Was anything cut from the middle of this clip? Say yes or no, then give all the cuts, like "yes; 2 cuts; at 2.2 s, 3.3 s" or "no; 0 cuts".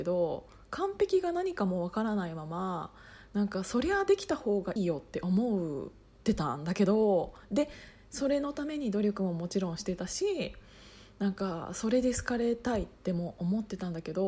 yes; 1 cut; at 4.8 s